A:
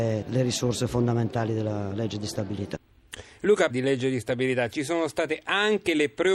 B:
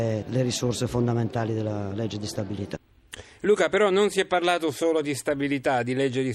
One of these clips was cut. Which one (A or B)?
A